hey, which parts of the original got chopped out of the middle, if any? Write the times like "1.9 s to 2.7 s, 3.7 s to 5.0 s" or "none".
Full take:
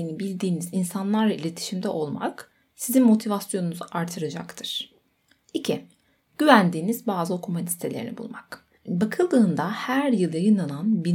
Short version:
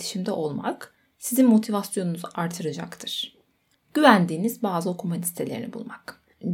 5.3 s to 6.2 s